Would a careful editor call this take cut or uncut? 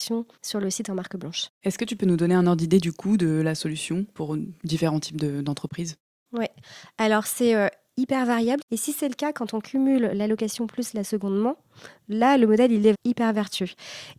cut